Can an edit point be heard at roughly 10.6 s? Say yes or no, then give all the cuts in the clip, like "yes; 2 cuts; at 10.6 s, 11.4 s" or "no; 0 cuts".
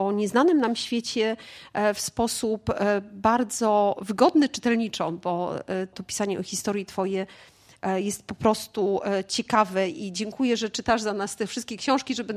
no; 1 cut; at 5.9 s